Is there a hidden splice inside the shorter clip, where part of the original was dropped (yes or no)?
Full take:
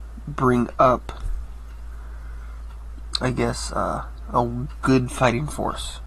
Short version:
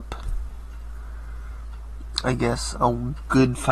yes